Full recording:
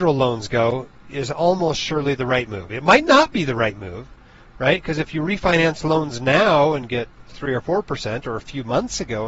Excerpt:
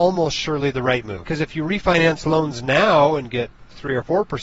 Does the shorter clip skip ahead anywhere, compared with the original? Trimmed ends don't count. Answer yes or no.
yes